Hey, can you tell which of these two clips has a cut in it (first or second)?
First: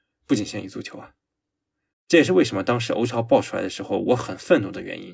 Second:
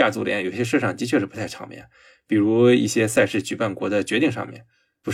first